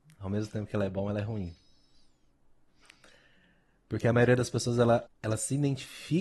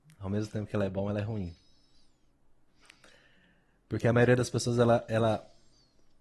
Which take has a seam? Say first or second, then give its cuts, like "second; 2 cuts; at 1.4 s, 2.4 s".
first; 1 cut; at 5.1 s